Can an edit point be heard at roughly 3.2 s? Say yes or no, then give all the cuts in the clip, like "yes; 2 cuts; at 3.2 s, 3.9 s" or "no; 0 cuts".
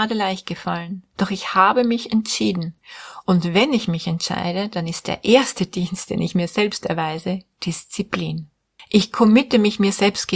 no; 0 cuts